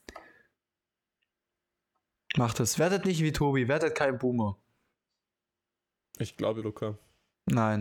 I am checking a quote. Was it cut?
yes; 1 cut; at 6.6 s

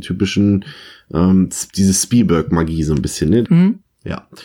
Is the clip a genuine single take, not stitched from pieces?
no; 2 cuts; at 1.7 s, 3.4 s

